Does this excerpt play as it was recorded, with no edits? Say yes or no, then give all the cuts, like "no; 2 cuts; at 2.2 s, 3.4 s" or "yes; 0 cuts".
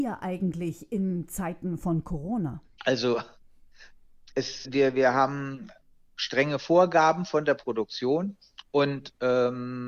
no; 2 cuts; at 2.8 s, 4.6 s